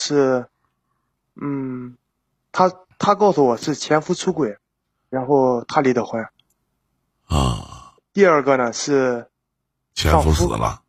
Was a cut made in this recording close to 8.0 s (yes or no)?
yes